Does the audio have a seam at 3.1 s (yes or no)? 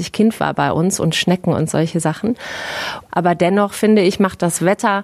yes